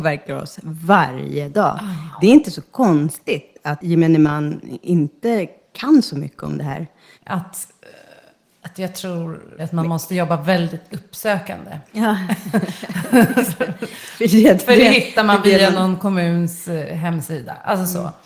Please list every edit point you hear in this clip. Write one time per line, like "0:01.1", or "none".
0:07.1
0:09.6
0:11.9